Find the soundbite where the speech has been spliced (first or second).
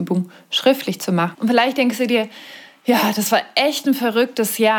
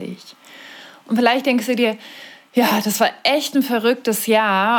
first